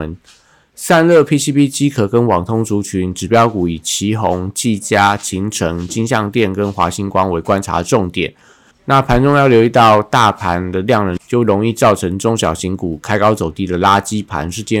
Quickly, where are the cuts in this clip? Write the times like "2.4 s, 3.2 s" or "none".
8.7 s, 11.2 s